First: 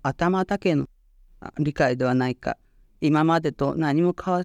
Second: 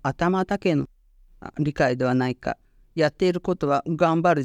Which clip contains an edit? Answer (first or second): first